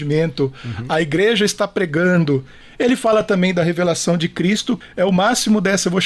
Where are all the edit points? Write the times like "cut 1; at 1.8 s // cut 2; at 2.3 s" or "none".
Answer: none